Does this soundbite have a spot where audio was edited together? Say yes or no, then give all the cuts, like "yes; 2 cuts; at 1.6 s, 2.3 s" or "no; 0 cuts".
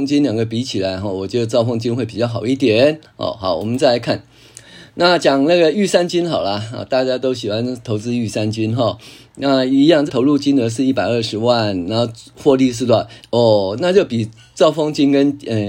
yes; 2 cuts; at 10.1 s, 13.2 s